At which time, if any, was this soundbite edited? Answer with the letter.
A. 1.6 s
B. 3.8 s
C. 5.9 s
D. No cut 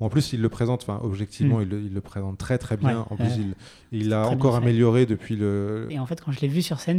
C